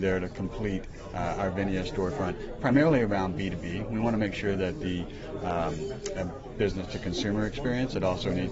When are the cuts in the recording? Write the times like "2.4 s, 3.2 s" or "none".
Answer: 6.1 s